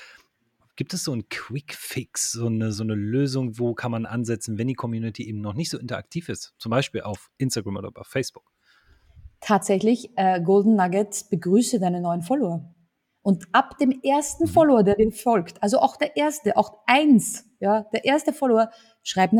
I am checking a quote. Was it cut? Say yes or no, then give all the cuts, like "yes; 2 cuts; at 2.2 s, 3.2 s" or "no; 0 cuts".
no; 0 cuts